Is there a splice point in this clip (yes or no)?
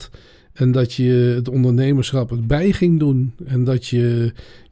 no